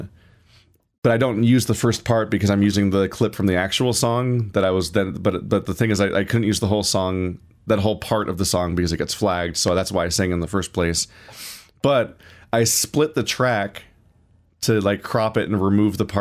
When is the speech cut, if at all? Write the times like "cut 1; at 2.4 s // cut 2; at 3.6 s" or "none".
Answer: none